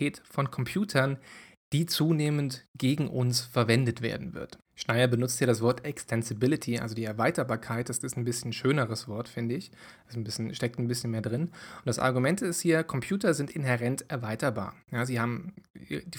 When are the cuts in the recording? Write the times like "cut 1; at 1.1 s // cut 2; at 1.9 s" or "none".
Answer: cut 1; at 4.6 s